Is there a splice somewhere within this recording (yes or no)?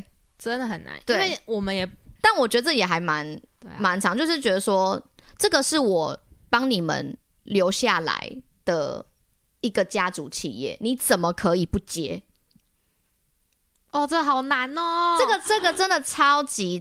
yes